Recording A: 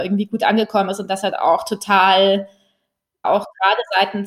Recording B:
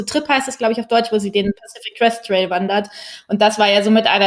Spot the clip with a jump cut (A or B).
A